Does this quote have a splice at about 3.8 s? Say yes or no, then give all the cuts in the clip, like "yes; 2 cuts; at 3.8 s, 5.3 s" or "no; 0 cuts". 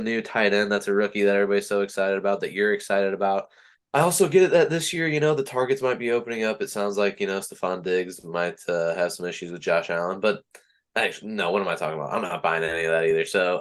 yes; 1 cut; at 3.8 s